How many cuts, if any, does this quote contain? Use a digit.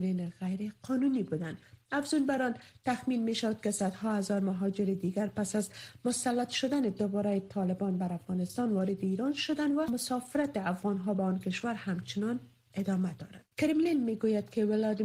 1